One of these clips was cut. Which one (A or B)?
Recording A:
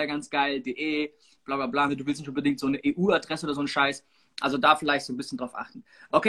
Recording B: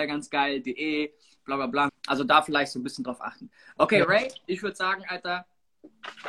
B